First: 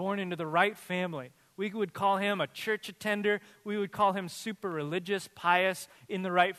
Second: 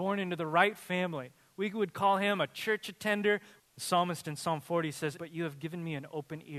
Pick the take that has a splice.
second; 2 cuts; at 3.6 s, 5.2 s

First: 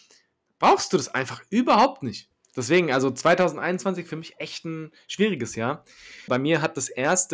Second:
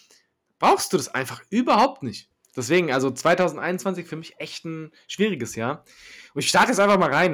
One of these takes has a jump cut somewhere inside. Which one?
first; 1 cut; at 6.3 s

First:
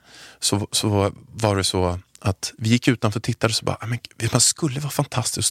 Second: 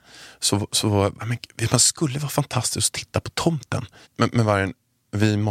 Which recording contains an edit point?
second; 2 cuts; at 1.2 s, 4.0 s

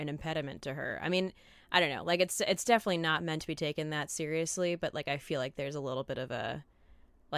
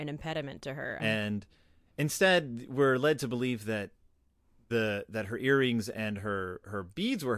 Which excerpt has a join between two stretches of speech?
second; 1 cut; at 1.0 s

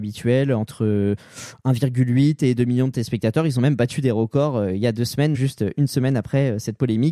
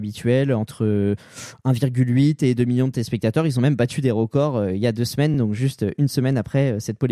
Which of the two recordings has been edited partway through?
first; 1 cut; at 5.3 s

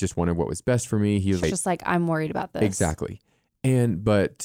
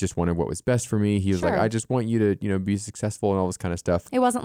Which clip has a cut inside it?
first; 1 cut; at 1.4 s

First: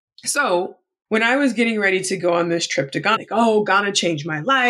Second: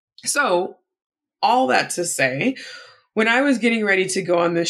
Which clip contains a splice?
first; 2 cuts; at 1.1 s, 3.2 s

